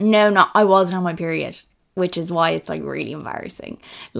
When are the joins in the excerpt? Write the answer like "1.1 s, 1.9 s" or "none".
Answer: none